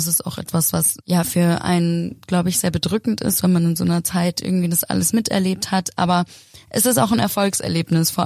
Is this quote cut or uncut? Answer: uncut